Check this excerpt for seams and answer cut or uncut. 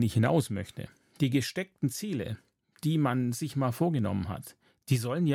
uncut